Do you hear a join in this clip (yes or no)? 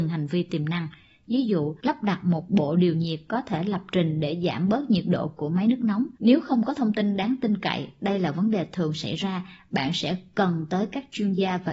no